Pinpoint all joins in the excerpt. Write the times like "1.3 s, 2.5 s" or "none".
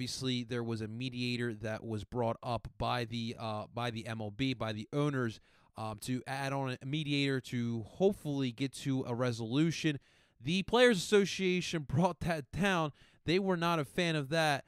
none